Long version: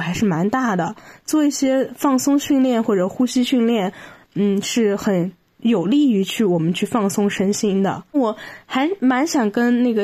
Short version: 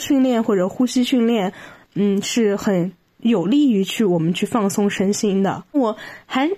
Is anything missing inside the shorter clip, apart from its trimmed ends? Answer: no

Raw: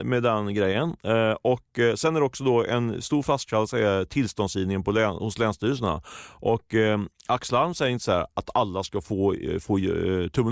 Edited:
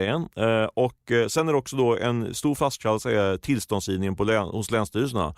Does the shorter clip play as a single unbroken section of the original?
yes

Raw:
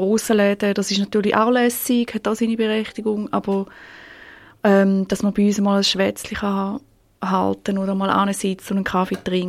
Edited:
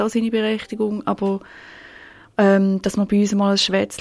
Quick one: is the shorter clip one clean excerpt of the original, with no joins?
yes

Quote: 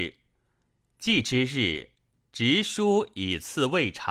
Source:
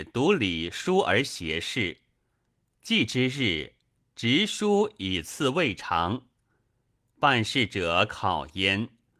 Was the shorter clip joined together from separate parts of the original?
no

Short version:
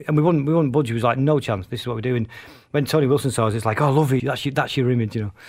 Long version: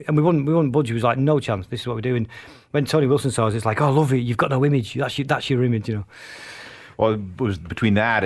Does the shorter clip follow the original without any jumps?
no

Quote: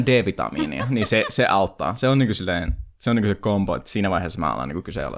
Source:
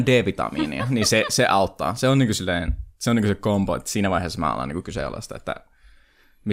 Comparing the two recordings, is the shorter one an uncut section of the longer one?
yes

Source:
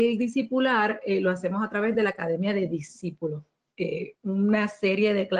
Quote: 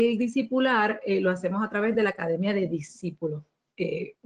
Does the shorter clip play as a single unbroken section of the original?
yes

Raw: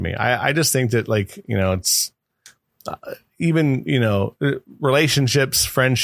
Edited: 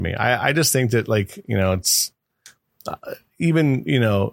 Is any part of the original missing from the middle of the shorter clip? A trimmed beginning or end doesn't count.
no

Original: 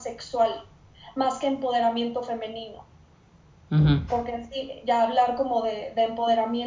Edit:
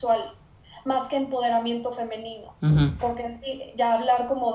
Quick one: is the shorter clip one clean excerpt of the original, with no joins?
no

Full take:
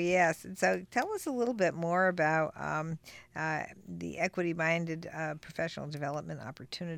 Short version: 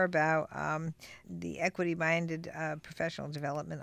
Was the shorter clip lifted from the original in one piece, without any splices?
no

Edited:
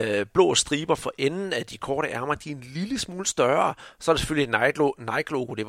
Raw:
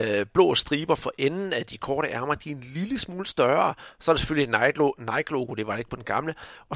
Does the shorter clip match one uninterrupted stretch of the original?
yes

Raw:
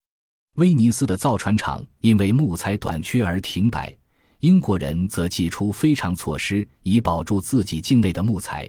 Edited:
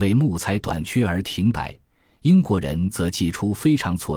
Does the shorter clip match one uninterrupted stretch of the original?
yes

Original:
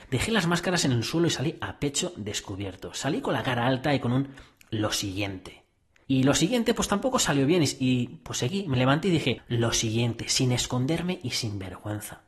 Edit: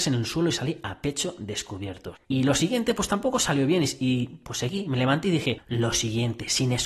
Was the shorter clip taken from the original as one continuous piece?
no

